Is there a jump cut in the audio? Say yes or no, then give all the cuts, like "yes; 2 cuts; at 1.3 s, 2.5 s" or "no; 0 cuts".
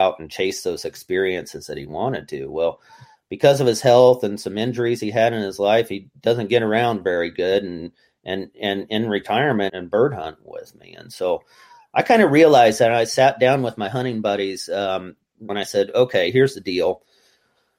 yes; 2 cuts; at 9.7 s, 15.5 s